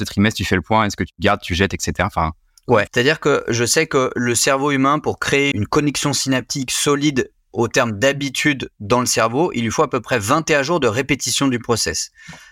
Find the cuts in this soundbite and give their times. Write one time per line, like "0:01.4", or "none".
0:02.9
0:05.5